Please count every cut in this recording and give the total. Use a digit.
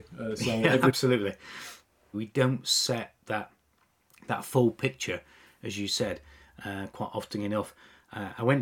1